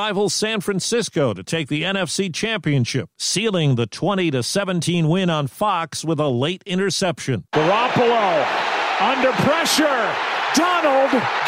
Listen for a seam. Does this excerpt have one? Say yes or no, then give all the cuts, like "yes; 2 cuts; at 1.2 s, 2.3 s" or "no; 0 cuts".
no; 0 cuts